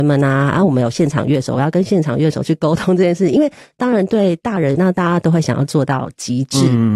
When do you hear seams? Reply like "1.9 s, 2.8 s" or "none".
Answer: 4.7 s